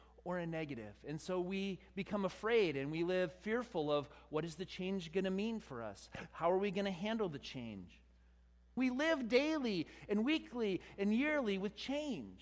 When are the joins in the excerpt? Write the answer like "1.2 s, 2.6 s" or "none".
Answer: 8.8 s